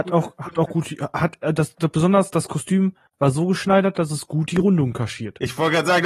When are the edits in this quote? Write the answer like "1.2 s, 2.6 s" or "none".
none